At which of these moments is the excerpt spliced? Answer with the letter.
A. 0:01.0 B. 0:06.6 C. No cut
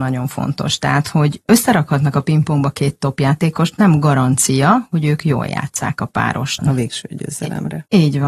B